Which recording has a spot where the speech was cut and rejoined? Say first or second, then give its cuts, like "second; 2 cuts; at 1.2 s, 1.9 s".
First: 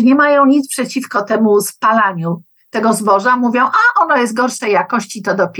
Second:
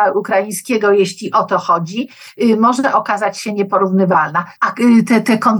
second; 1 cut; at 4.6 s